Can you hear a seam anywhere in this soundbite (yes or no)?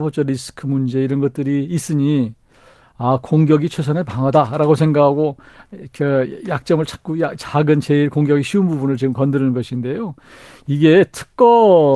no